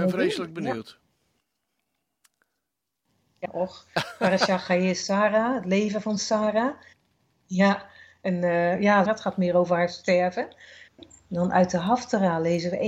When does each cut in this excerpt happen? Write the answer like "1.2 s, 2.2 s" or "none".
3.4 s, 9.1 s, 10.9 s